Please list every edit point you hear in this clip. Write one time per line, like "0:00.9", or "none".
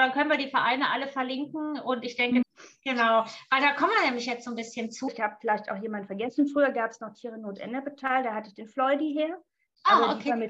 0:02.4
0:05.1

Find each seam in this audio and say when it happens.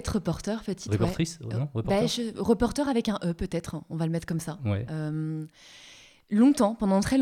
none

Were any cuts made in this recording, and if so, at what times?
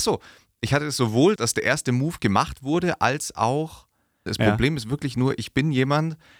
0:01.4
0:04.3

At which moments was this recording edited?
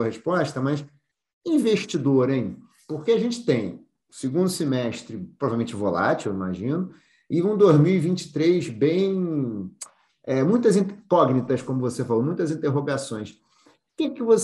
none

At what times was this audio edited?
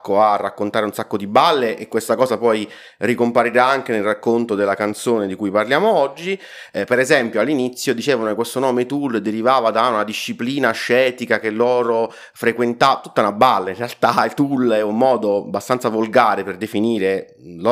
none

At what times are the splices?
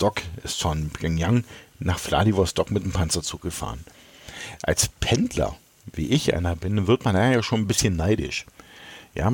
none

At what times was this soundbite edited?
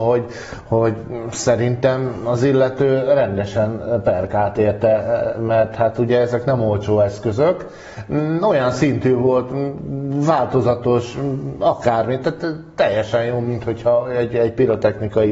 none

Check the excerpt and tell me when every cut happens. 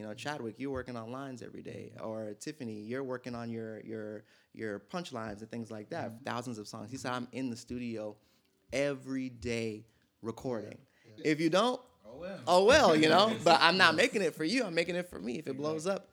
0:06.2
0:11.2

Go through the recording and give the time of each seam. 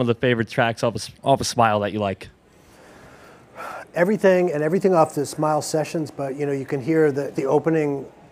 0:01.2
0:07.3

